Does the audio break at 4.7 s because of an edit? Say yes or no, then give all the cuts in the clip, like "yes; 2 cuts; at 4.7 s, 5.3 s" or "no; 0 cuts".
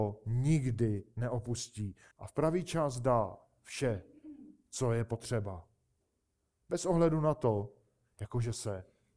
no; 2 cuts; at 2.1 s, 8.0 s